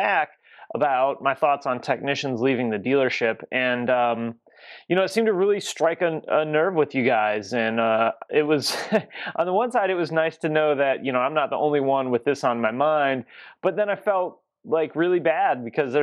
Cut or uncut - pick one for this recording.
uncut